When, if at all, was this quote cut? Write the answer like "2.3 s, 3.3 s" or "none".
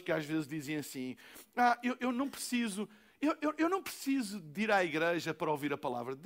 none